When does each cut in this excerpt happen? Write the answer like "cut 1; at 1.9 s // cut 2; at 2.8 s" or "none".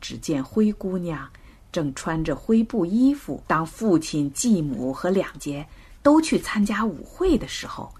cut 1; at 3.4 s // cut 2; at 5.4 s